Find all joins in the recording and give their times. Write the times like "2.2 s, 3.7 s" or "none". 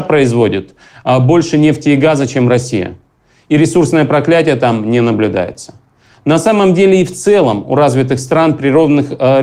none

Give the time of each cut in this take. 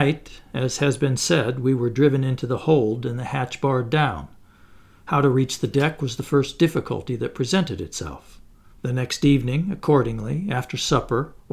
8.7 s

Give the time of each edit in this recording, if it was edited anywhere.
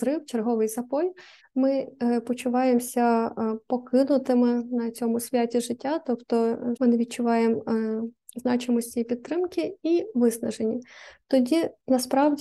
1.4 s, 6.8 s

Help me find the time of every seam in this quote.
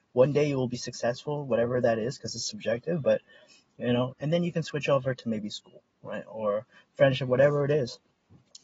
4.1 s

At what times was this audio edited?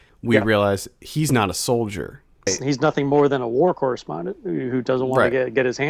2.5 s

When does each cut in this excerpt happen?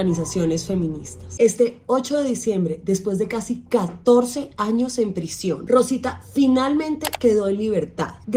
1.4 s

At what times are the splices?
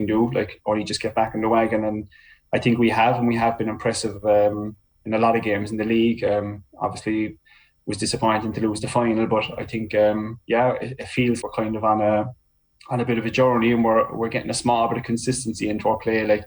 11.4 s

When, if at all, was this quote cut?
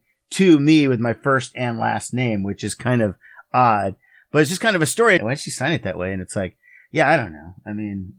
5.2 s

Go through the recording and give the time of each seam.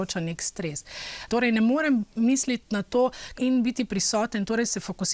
1.3 s, 3.3 s

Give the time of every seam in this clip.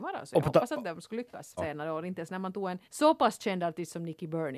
1.6 s, 2.8 s

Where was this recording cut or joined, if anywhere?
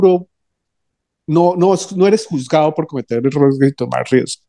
none

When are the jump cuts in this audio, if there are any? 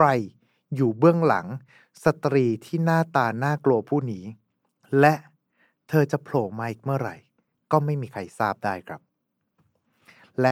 none

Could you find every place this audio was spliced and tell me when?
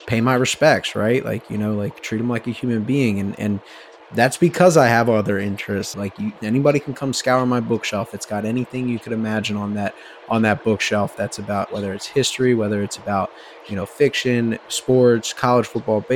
5.9 s

